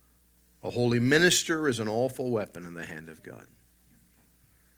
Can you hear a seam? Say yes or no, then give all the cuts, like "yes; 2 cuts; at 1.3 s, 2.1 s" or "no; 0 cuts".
no; 0 cuts